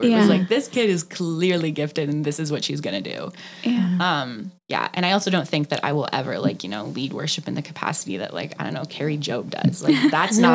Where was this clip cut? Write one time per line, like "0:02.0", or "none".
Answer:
0:04.6